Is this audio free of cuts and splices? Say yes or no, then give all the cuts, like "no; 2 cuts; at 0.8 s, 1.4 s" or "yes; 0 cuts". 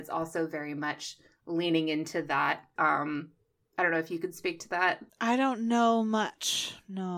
no; 1 cut; at 2.8 s